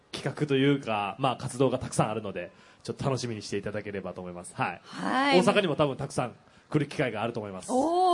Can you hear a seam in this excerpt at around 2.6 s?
no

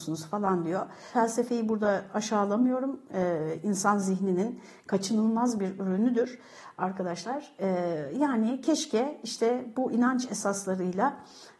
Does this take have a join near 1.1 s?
yes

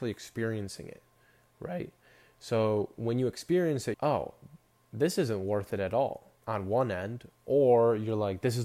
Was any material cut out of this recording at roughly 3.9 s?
yes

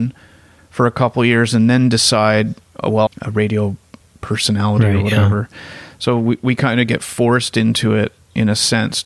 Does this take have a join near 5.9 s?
no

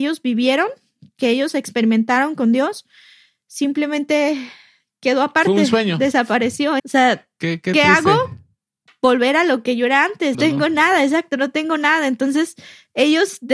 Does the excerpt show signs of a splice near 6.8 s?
yes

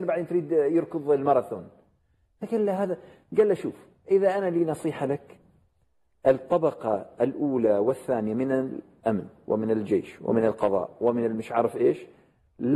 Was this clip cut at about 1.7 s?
no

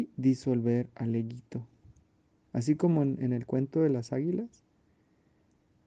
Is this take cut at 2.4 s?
yes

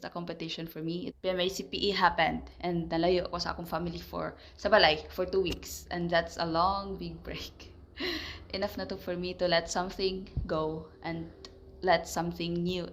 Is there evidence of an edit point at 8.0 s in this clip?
no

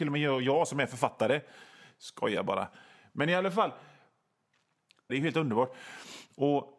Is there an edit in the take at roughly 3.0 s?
no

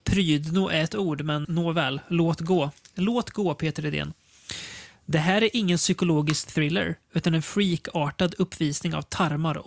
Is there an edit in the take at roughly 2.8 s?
no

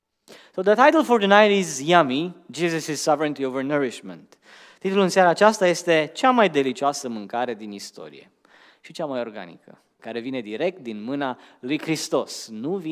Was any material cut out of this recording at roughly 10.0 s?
yes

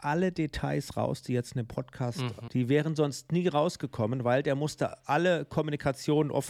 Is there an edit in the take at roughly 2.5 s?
yes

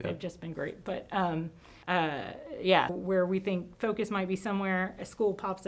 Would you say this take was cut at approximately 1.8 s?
yes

